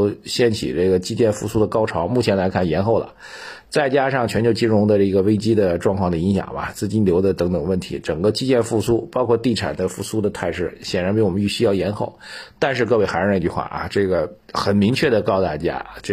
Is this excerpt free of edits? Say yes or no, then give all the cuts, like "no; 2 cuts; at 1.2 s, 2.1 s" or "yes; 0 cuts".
no; 1 cut; at 14.4 s